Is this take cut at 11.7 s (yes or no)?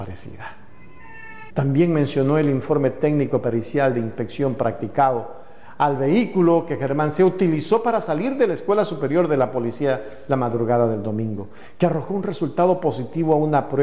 no